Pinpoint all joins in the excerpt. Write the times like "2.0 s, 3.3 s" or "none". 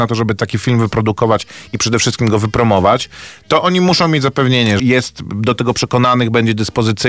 4.8 s